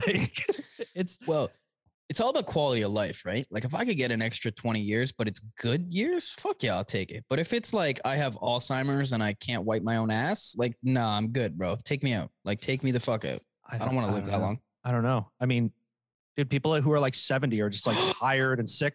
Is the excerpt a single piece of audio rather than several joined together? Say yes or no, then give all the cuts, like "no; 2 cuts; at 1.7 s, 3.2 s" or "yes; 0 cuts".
yes; 0 cuts